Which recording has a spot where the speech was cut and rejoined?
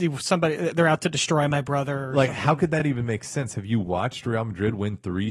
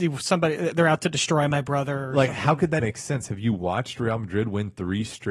second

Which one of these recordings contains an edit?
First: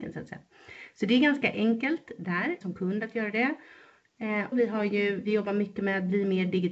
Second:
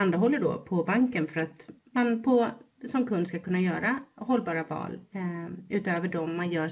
first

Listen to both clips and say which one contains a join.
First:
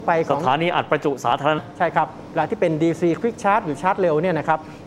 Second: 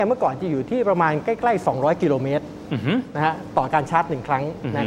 first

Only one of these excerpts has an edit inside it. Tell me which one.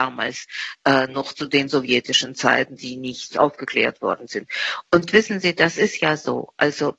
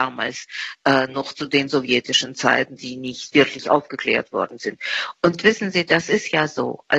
first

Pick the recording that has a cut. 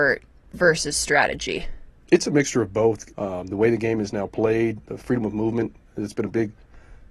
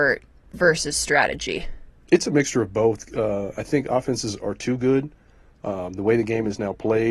first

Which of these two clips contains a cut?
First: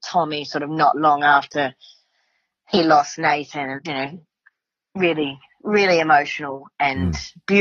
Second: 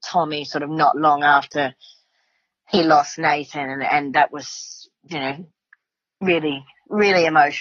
first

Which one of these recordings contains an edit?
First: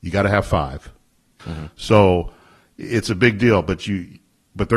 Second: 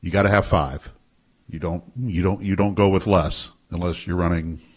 first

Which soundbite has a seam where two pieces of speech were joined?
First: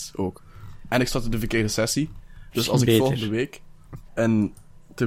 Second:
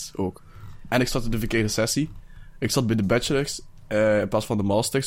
first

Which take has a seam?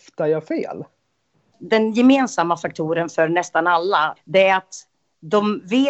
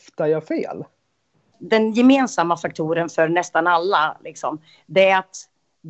first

